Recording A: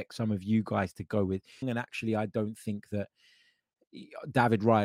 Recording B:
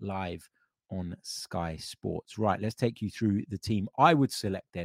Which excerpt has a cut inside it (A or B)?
A